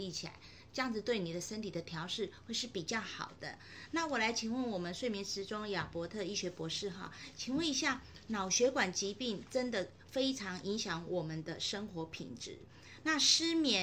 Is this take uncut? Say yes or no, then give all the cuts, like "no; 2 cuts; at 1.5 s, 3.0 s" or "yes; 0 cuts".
yes; 0 cuts